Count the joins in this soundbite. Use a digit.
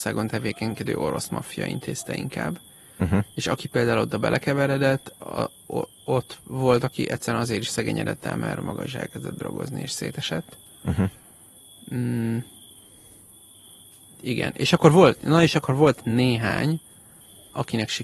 0